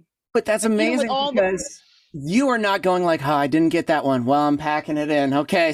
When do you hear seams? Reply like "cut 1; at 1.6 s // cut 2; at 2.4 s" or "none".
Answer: none